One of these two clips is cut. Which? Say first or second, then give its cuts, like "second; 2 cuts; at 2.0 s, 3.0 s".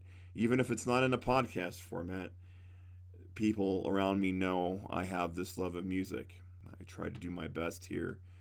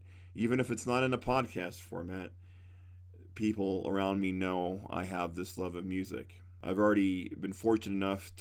first; 1 cut; at 6.6 s